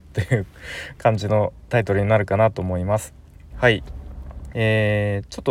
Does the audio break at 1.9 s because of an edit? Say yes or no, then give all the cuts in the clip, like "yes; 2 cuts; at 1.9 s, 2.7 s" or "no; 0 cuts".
no; 2 cuts; at 3.5 s, 4.5 s